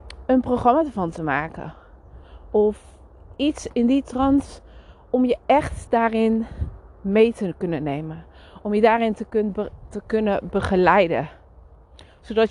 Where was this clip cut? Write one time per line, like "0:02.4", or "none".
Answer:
none